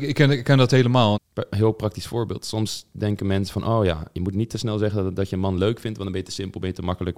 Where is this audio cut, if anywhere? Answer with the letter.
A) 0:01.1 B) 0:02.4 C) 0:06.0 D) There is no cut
A